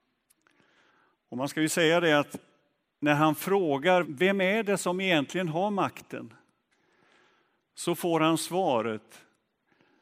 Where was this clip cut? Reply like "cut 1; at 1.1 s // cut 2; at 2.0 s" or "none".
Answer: cut 1; at 4.0 s